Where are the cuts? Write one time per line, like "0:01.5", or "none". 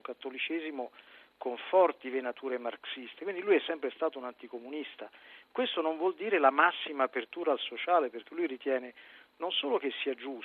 none